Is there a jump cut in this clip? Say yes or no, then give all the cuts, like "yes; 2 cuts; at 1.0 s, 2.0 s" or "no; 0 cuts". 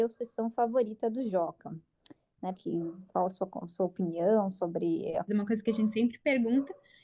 yes; 2 cuts; at 2.5 s, 5.3 s